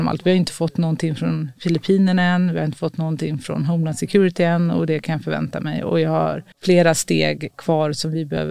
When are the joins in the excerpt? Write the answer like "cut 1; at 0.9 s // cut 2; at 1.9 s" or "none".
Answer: cut 1; at 6.5 s